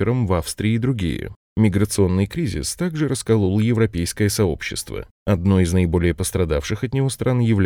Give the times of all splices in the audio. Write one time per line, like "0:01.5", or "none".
none